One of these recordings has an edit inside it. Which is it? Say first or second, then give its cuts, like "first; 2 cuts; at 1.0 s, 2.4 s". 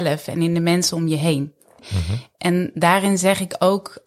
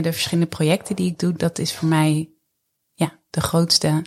first; 1 cut; at 1.8 s